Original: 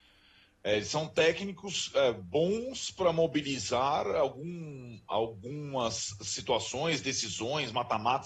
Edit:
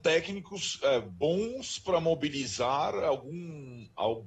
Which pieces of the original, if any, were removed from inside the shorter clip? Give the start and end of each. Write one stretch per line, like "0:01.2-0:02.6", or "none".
none